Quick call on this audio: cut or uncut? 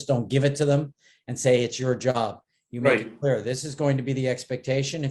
uncut